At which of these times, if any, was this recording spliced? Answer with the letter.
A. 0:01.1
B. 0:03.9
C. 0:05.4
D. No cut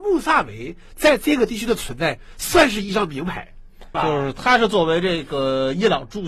B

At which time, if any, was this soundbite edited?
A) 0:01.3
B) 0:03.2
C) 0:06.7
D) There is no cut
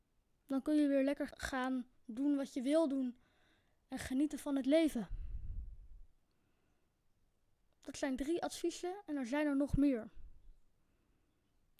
A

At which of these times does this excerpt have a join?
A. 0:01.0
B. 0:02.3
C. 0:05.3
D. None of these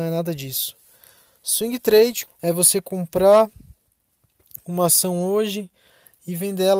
B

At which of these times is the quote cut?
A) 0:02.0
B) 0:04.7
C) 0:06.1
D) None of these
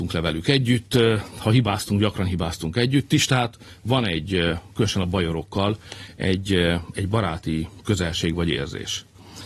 D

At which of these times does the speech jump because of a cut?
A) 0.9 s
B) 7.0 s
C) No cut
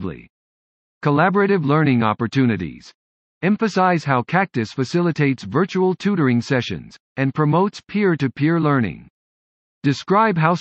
B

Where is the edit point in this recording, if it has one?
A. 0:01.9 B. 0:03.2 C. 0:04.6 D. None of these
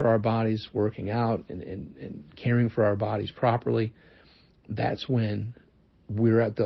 D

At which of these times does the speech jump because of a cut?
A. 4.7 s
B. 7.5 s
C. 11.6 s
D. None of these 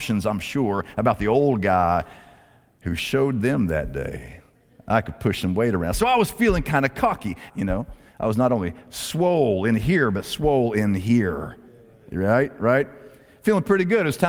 B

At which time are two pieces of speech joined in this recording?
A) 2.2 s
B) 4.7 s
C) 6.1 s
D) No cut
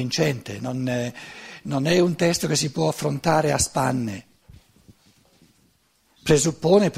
D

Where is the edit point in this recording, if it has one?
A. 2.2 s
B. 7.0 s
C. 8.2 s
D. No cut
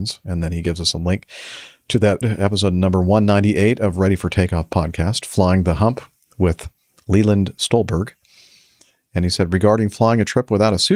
A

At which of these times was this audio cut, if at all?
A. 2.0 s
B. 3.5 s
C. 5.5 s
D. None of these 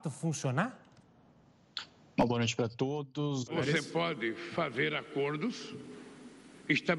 B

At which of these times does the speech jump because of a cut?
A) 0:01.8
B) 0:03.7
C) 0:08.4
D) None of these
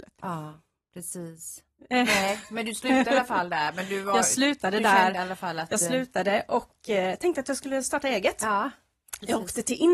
A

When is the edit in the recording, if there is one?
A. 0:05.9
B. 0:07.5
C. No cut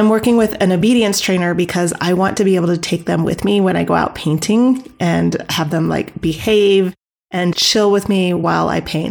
B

